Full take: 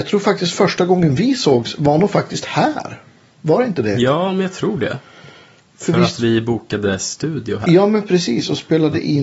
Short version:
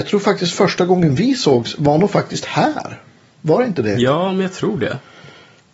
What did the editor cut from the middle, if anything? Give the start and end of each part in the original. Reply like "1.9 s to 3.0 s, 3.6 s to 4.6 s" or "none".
none